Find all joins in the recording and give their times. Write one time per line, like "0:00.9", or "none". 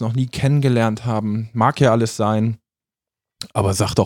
none